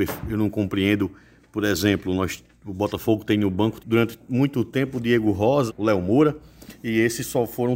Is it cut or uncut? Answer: cut